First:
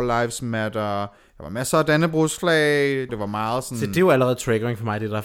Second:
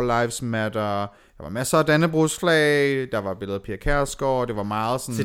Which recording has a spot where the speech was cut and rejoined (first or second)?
first